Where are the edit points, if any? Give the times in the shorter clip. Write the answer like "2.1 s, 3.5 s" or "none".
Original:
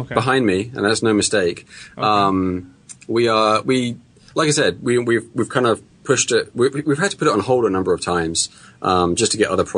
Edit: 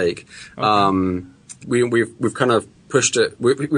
1.6 s